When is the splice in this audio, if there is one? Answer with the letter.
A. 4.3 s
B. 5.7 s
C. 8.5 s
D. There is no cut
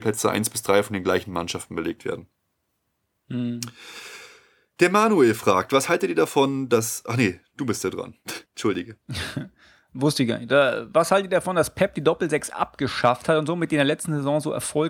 C